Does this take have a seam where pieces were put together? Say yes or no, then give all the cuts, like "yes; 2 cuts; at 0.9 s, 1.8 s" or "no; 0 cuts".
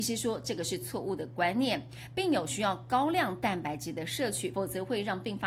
yes; 1 cut; at 4.5 s